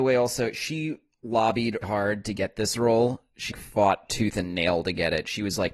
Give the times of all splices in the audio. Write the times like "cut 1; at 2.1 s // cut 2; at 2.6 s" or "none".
cut 1; at 1.8 s // cut 2; at 3.5 s